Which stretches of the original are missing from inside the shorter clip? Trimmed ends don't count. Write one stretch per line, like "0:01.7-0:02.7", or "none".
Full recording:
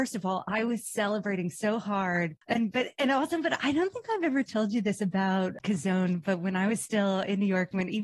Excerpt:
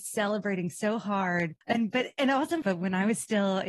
0:03.4-0:06.2